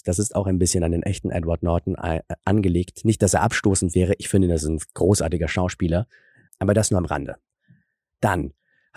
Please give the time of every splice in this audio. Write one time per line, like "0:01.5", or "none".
0:06.5